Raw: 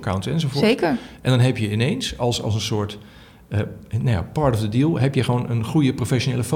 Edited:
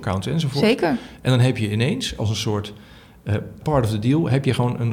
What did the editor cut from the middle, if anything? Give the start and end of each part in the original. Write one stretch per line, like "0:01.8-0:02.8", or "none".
0:02.2-0:02.4
0:03.9-0:04.3